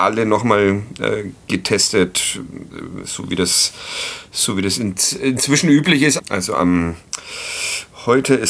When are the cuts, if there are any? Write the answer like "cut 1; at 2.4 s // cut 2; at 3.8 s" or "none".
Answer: cut 1; at 6.2 s